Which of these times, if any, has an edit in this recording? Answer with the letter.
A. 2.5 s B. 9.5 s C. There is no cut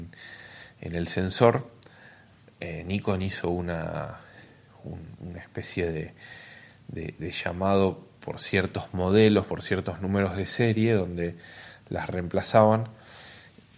C